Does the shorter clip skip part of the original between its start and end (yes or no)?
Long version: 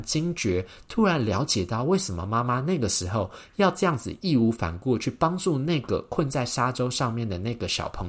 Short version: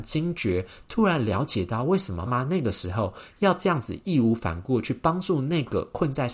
yes